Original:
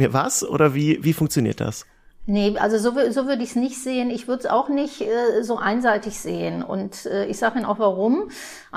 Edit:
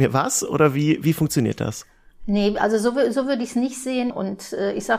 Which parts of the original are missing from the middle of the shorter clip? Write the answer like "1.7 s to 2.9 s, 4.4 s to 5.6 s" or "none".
4.1 s to 6.6 s

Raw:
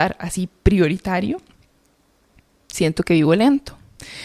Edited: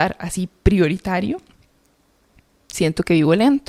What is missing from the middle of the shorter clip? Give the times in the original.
none

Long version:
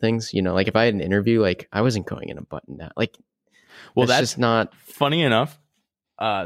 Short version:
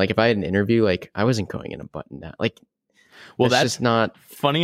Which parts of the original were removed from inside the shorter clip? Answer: none

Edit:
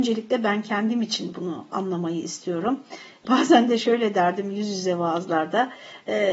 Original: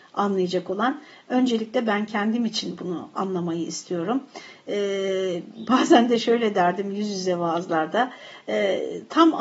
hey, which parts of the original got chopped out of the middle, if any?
4.7 s to 5.7 s

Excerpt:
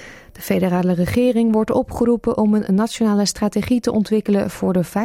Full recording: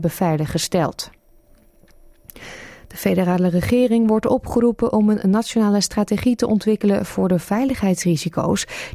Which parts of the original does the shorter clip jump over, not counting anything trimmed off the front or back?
none

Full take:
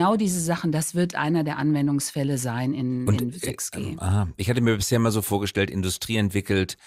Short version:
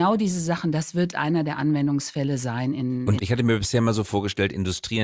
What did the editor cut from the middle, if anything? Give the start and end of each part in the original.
3.2 s to 4.4 s

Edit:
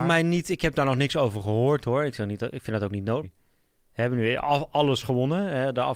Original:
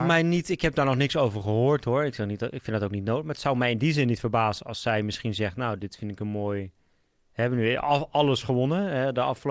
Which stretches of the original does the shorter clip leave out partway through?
3.2 s to 6.6 s

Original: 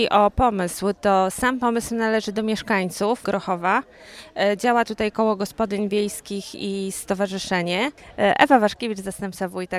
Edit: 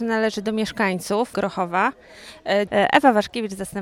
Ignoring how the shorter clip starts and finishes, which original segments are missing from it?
4.6 s to 8.1 s

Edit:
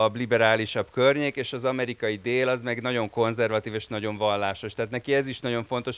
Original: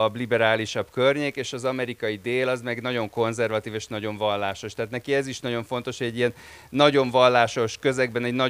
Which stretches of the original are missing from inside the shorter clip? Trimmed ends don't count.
none

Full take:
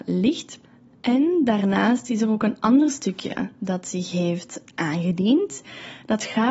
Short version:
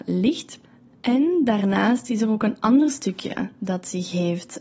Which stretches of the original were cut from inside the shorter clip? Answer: none

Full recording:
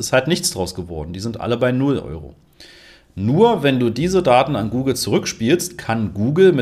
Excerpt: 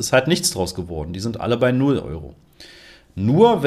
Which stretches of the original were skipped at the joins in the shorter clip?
none

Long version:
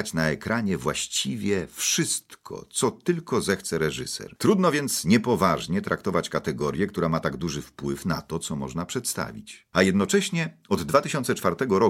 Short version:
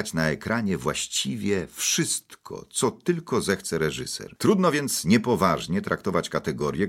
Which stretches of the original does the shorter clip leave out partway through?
none

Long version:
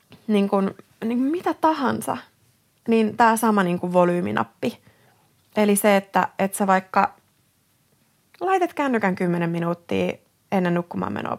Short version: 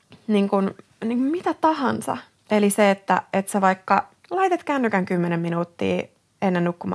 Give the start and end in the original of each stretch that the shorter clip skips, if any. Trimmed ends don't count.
2.3 s to 5.4 s, 7.2 s to 8.3 s

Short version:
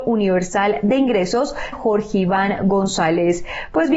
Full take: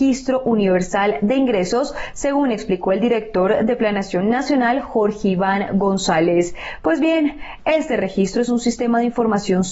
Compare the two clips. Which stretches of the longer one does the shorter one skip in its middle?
2.1 s to 4.8 s

